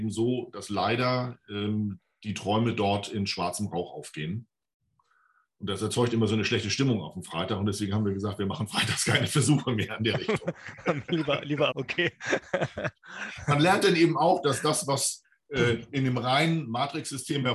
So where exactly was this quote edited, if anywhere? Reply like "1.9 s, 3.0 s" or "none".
11.7 s

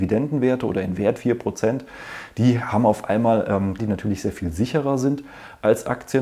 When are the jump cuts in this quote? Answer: 1.2 s, 3.8 s

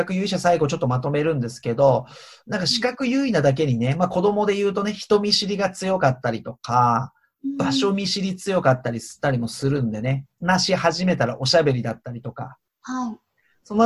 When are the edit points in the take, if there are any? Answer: 10.4 s, 12.7 s

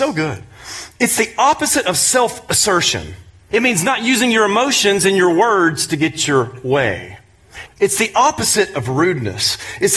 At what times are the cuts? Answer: 3.5 s, 7.7 s

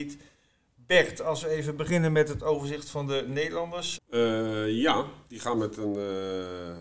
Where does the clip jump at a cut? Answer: 4.0 s

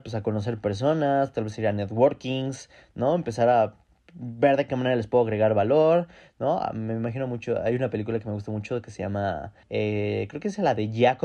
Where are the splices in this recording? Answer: 9.6 s

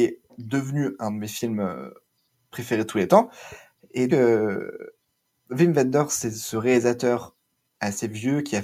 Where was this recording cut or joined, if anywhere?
4.1 s

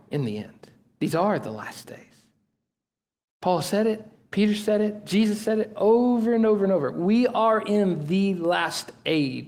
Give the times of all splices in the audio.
none

